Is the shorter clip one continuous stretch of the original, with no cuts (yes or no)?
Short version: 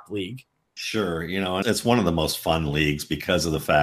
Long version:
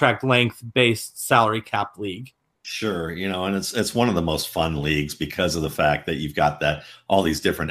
no